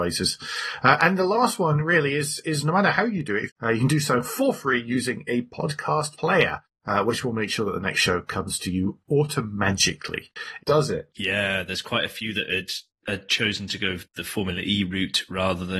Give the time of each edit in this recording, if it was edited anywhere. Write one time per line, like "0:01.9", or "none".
0:03.5
0:10.6